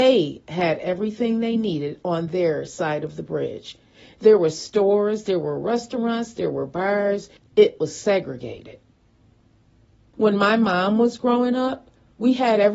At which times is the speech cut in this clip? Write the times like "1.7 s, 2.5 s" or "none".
7.4 s, 10.1 s